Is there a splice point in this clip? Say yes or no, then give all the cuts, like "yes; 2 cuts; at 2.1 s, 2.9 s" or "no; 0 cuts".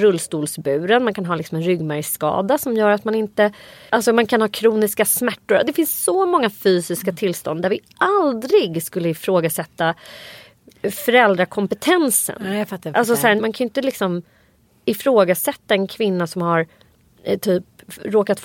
yes; 1 cut; at 13.4 s